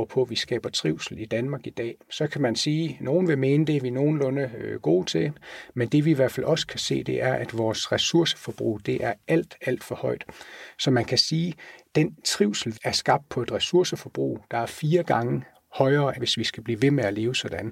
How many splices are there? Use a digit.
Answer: 3